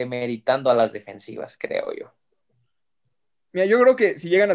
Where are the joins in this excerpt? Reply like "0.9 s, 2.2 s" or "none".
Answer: none